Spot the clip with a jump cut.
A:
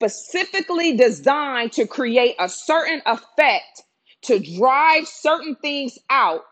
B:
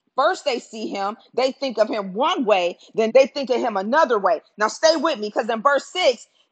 B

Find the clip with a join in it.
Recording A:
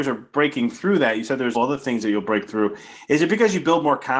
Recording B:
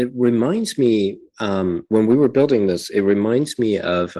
A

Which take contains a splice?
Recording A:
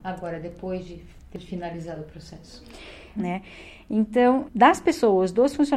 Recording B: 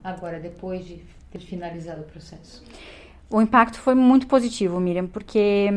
A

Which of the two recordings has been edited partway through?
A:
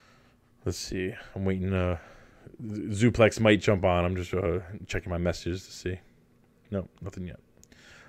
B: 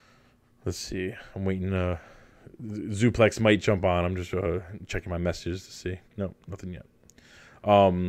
B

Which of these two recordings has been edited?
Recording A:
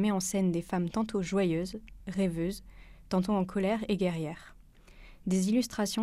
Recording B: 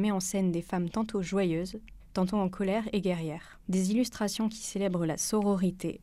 B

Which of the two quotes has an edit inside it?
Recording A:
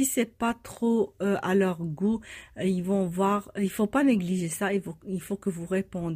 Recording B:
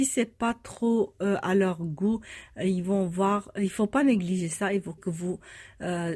B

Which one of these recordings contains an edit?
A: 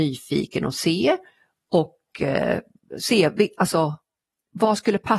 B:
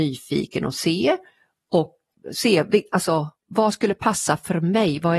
B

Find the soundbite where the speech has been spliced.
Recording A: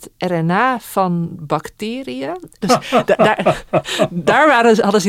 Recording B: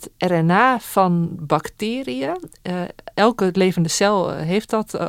A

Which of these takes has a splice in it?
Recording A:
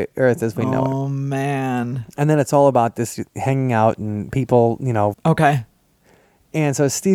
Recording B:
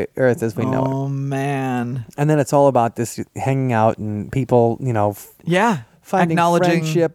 A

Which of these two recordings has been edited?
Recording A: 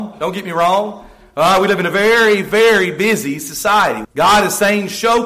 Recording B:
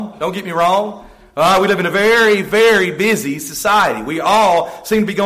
A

